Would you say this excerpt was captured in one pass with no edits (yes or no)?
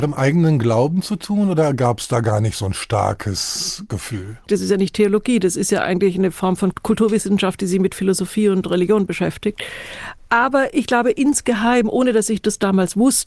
no